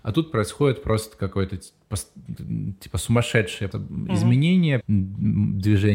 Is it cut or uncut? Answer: cut